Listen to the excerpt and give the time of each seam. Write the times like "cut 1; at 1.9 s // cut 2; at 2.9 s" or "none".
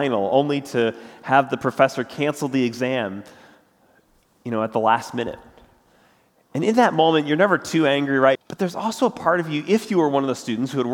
cut 1; at 8.4 s

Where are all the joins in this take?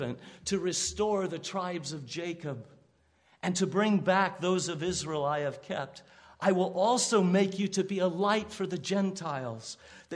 none

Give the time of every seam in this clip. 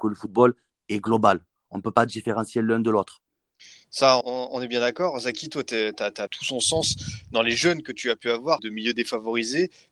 cut 1; at 4.2 s // cut 2; at 6.3 s // cut 3; at 8.6 s

